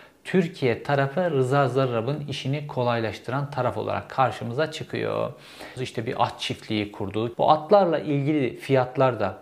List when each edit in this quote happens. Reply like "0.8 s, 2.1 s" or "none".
5.8 s, 7.3 s